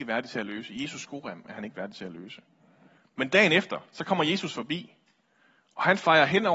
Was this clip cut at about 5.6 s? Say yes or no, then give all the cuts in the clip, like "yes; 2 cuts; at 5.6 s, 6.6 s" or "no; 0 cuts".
no; 0 cuts